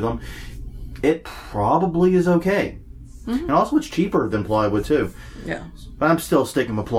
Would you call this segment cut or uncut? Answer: uncut